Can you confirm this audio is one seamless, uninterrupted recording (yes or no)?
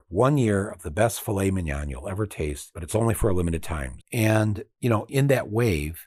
no